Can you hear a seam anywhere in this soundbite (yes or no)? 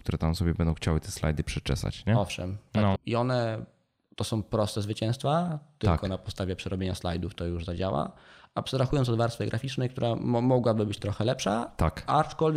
yes